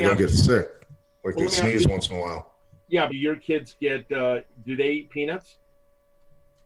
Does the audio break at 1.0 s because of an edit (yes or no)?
no